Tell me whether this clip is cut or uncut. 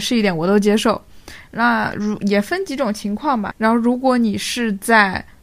cut